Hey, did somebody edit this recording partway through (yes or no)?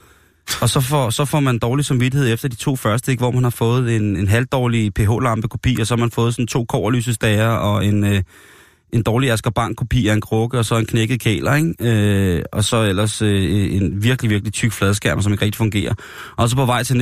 no